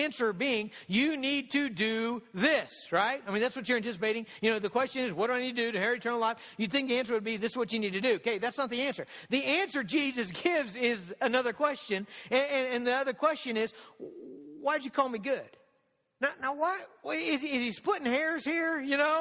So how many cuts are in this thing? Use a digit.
0